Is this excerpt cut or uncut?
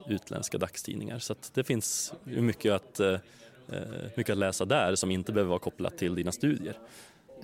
uncut